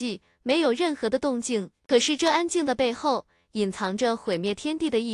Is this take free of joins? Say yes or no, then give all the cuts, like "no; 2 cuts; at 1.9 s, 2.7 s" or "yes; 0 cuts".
yes; 0 cuts